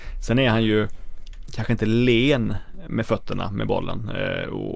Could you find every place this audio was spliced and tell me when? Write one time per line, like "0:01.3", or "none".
0:01.5